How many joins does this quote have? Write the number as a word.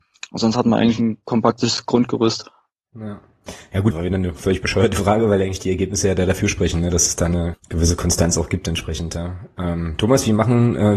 two